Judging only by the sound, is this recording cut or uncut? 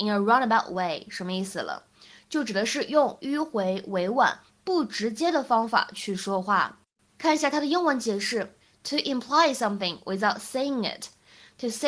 uncut